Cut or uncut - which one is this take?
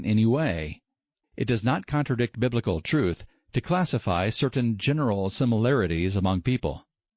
cut